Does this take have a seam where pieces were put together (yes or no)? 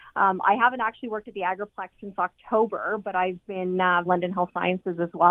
yes